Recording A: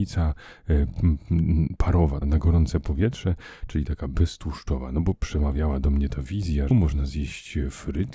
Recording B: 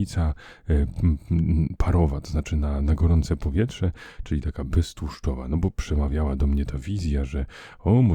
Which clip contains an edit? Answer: A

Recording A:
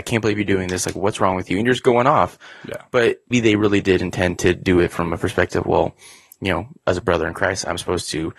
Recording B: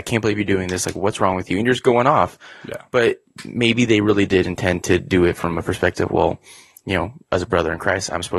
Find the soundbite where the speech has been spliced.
A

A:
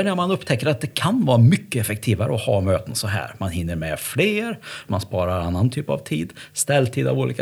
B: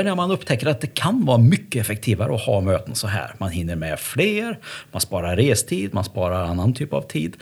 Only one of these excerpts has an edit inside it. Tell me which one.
A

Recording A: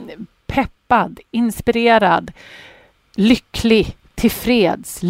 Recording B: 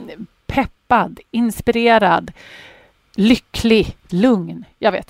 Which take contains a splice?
B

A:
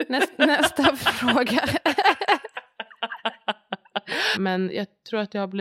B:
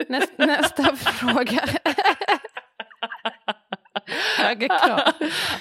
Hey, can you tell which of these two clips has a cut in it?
A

